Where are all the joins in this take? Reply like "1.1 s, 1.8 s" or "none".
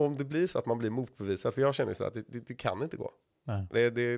none